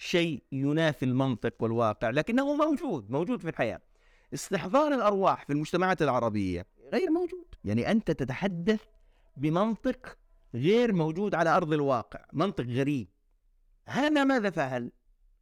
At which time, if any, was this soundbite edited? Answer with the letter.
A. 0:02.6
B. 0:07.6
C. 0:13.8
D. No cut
B